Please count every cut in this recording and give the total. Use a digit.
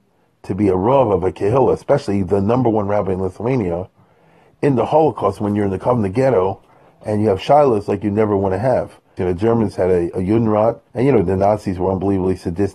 2